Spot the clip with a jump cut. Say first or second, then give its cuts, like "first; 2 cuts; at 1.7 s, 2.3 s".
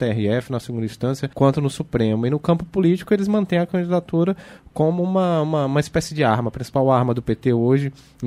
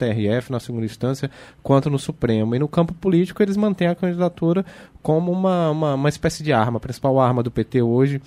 first; 1 cut; at 1.3 s